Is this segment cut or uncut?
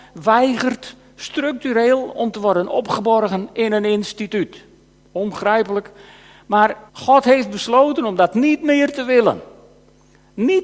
cut